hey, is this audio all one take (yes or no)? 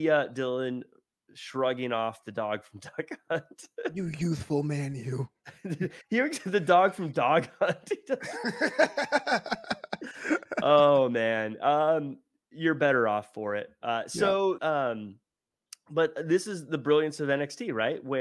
no